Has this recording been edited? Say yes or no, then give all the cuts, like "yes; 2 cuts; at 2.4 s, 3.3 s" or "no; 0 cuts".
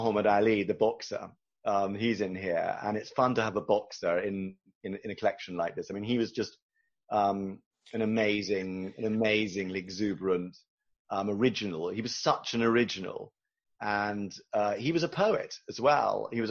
no; 0 cuts